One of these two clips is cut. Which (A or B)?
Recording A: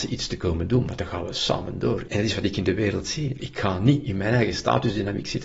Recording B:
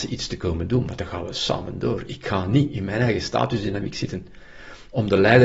A